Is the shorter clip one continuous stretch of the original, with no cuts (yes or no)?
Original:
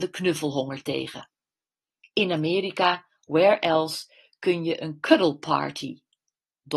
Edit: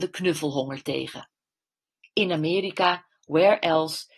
yes